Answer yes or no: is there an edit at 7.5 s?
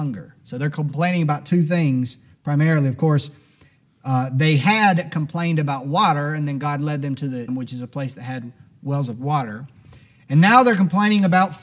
yes